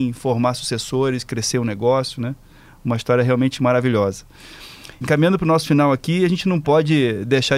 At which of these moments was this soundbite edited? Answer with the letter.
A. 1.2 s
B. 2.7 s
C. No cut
C